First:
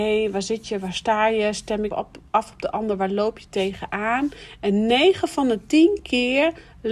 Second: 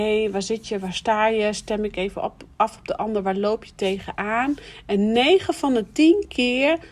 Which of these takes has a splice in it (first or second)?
first